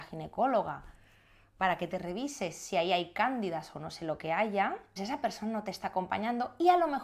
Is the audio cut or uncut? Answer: cut